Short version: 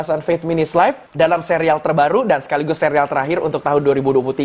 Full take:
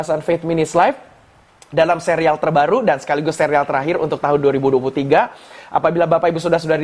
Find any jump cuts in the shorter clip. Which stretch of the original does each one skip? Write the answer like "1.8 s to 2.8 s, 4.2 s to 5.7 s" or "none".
1.1 s to 1.6 s

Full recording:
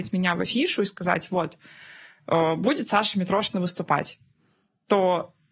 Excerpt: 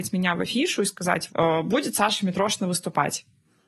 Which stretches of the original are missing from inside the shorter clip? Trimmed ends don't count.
1.3 s to 2.2 s

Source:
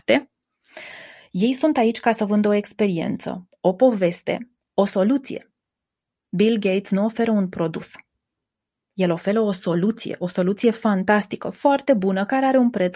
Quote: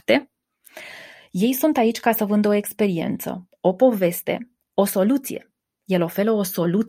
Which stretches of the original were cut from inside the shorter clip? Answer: 5.7 s to 8.8 s

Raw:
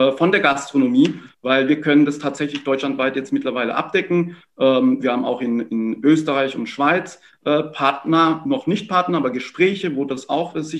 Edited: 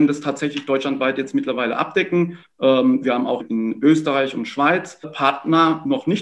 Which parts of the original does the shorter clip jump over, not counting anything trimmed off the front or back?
5.4 s to 5.6 s, 7.2 s to 7.6 s

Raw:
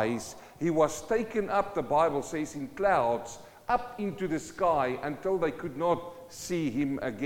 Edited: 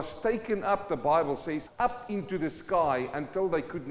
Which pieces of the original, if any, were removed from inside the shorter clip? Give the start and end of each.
2.5 s to 3.6 s

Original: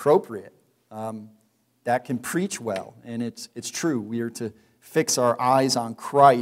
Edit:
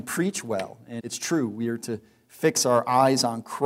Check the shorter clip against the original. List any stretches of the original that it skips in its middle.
3.2 s to 3.5 s

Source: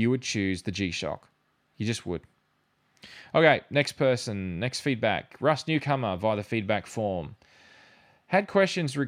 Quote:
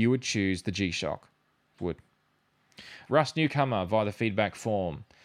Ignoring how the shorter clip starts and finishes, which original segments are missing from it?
1.8 s to 2.0 s, 3.3 s to 5.4 s

